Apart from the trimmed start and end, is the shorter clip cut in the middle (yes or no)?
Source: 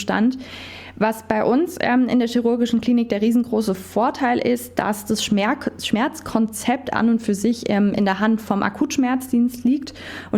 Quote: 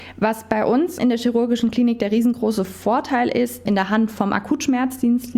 yes